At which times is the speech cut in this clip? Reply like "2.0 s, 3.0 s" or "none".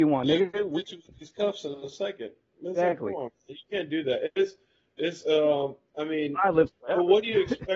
none